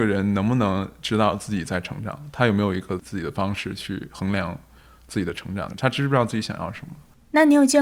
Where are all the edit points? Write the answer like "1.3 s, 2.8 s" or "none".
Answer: 5.7 s